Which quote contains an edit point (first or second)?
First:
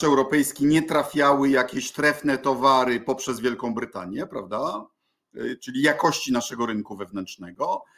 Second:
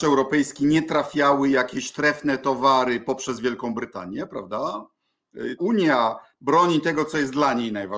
second